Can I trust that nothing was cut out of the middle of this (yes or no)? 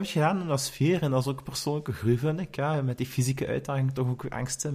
yes